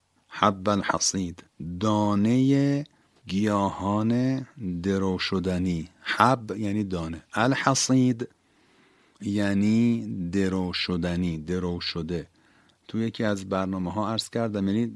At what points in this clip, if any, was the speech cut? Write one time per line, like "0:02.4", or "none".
none